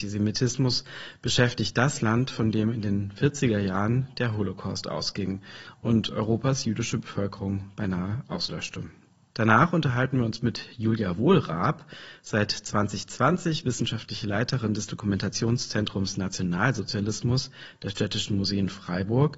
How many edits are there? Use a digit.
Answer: 1